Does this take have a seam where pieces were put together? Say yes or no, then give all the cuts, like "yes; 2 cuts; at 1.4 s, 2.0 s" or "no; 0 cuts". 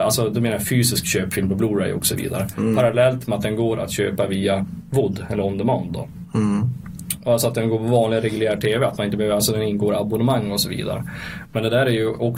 yes; 1 cut; at 7.2 s